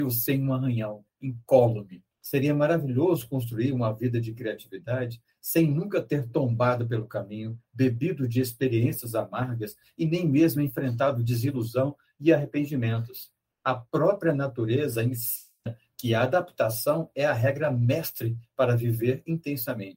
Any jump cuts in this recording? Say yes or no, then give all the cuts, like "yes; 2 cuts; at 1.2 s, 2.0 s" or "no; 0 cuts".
yes; 1 cut; at 2.1 s